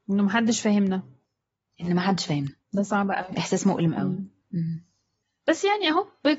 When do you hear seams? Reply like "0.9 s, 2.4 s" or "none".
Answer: 2.6 s